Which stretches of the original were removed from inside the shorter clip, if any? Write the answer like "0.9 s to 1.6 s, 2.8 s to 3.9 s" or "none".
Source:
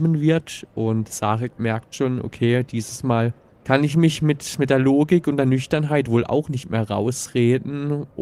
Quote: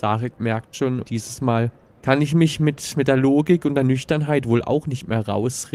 2.2 s to 2.6 s